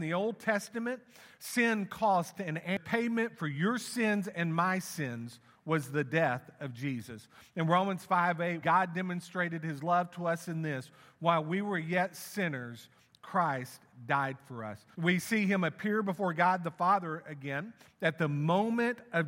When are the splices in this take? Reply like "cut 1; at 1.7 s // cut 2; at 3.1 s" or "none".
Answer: cut 1; at 8.6 s // cut 2; at 14.9 s // cut 3; at 17.9 s

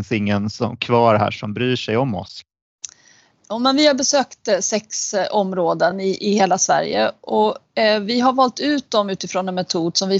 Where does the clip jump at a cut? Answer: none

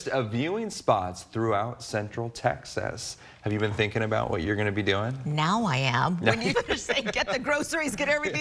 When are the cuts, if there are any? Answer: cut 1; at 6.5 s

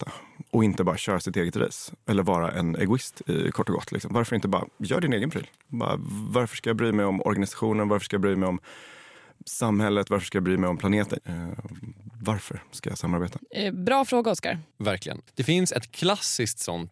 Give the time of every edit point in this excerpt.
cut 1; at 11.2 s // cut 2; at 15.3 s

